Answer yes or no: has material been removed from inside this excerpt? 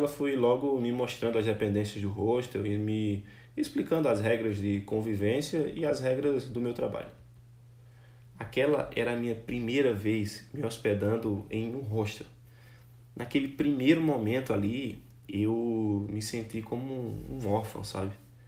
yes